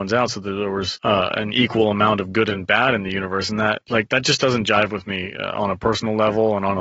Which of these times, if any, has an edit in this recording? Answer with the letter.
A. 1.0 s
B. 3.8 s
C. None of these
A